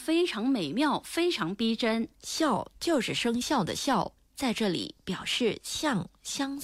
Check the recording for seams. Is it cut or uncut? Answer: uncut